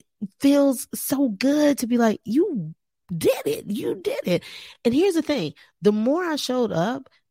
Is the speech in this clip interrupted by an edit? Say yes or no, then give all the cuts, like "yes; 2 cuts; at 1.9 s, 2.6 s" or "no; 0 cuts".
no; 0 cuts